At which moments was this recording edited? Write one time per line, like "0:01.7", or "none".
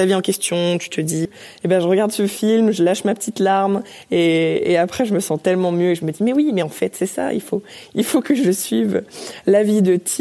0:01.3